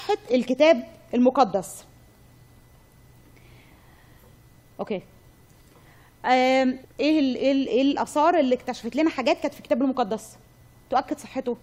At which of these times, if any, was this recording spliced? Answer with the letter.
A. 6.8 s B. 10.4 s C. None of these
A